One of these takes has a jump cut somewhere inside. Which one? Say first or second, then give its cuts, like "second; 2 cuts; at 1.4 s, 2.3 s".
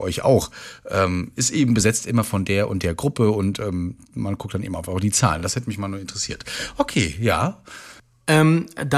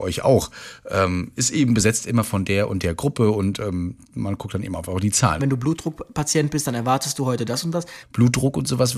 second; 2 cuts; at 5.4 s, 8.0 s